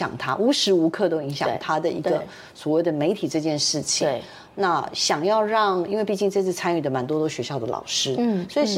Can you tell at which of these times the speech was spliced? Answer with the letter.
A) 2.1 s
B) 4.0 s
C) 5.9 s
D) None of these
D